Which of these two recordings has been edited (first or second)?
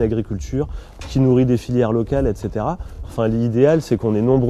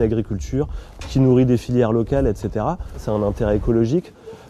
second